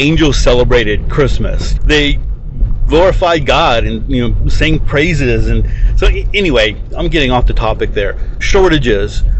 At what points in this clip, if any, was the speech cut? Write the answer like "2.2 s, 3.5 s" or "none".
1.8 s, 8.4 s